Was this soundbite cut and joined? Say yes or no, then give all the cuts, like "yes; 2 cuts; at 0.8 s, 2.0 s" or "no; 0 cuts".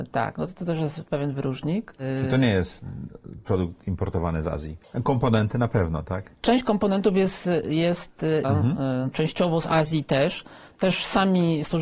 yes; 2 cuts; at 8.4 s, 10.8 s